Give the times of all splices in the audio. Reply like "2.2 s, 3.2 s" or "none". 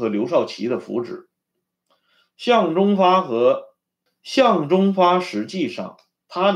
4.1 s